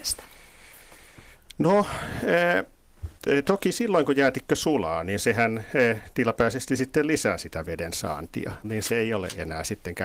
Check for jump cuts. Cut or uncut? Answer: cut